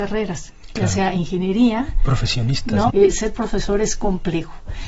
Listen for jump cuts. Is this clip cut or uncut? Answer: cut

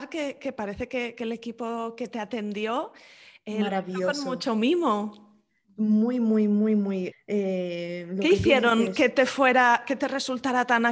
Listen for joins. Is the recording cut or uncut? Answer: cut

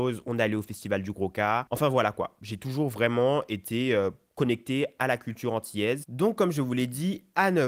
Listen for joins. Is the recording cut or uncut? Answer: cut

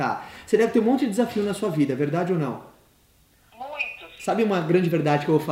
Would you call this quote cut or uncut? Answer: uncut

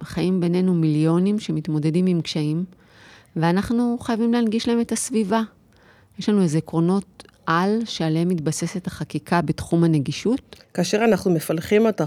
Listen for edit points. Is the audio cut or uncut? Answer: cut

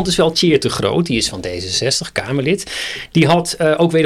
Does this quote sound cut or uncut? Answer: uncut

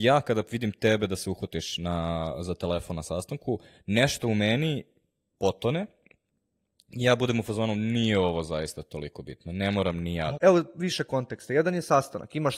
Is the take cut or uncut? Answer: cut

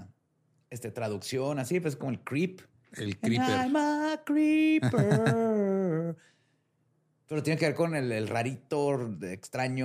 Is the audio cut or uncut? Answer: uncut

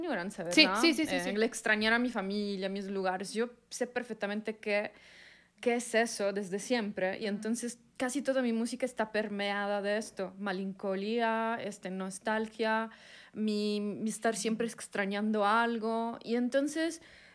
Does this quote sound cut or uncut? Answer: uncut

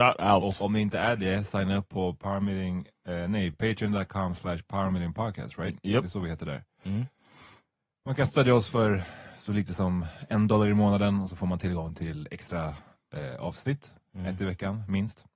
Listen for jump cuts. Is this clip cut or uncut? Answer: uncut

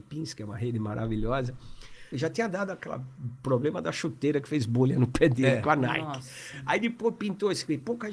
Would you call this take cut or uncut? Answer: cut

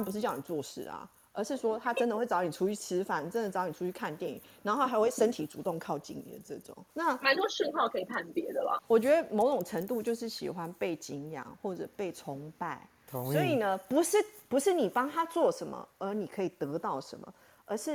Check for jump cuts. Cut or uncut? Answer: cut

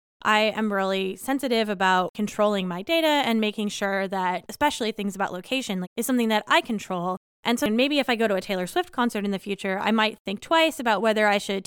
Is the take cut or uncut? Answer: cut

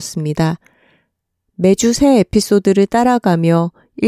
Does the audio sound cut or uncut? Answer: uncut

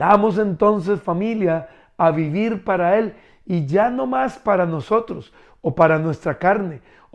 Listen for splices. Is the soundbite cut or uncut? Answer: uncut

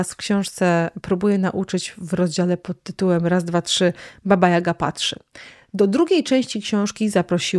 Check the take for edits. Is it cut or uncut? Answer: uncut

